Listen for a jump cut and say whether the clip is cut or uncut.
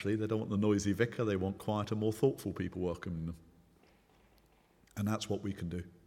uncut